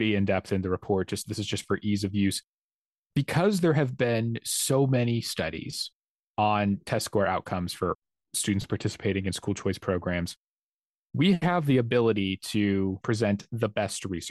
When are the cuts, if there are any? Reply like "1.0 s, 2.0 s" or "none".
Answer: 13.0 s